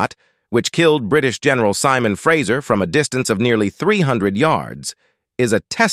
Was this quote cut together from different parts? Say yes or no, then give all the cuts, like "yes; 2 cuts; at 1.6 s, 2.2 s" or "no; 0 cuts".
no; 0 cuts